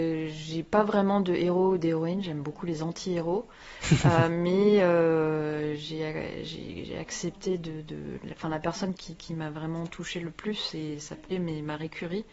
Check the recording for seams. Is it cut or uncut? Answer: cut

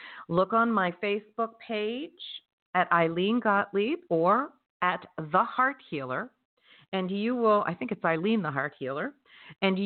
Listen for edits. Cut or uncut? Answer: cut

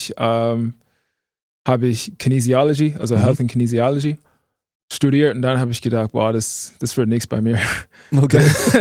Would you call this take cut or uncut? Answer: uncut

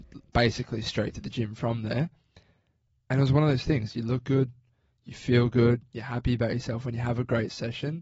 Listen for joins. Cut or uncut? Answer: uncut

